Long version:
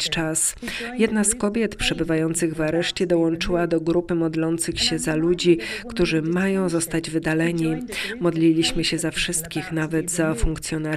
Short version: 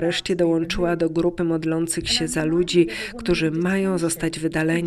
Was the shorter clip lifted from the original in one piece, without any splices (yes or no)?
yes